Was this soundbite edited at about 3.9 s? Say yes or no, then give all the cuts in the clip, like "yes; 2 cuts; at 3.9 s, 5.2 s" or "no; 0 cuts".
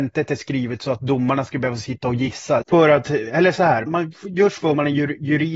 yes; 2 cuts; at 2.6 s, 3.9 s